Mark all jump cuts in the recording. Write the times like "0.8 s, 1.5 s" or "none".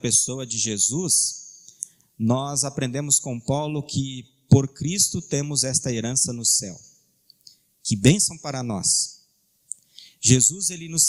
none